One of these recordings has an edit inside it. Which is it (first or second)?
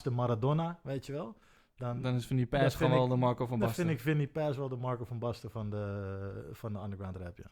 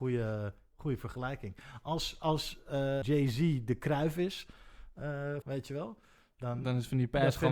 second